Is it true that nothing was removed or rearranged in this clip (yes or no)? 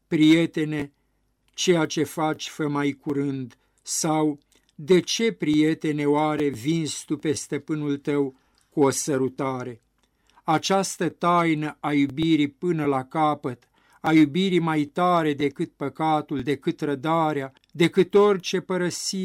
no